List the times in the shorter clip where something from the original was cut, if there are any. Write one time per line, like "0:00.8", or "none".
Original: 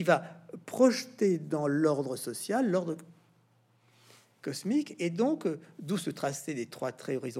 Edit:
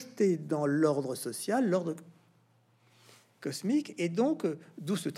none